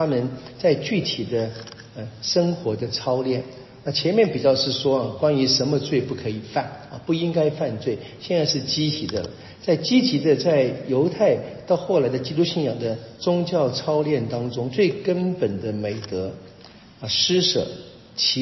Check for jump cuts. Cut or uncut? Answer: uncut